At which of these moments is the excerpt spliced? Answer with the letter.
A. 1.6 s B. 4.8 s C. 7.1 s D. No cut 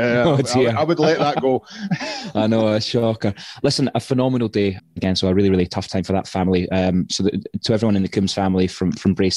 B